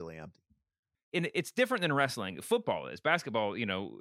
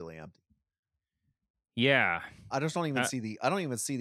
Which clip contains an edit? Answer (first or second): first